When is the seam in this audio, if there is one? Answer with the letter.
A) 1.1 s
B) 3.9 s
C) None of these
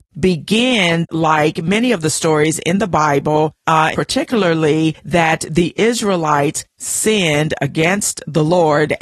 B